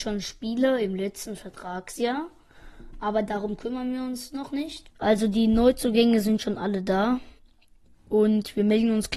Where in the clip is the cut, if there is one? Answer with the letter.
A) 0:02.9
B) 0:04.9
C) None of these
B